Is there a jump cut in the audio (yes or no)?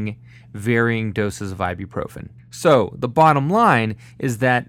yes